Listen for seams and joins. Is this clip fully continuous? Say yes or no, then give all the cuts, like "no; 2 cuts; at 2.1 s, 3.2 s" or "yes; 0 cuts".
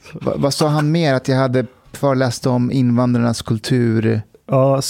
yes; 0 cuts